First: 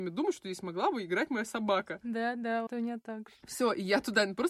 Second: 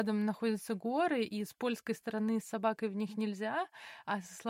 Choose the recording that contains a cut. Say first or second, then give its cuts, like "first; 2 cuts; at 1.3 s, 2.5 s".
first; 1 cut; at 2.7 s